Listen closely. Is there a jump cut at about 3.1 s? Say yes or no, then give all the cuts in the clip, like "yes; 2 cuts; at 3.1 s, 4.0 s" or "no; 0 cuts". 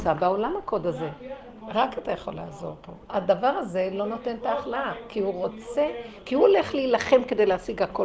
yes; 2 cuts; at 1.6 s, 3.1 s